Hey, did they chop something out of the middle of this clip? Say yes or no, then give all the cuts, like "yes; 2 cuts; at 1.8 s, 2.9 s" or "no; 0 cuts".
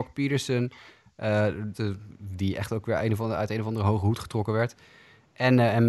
yes; 1 cut; at 1.7 s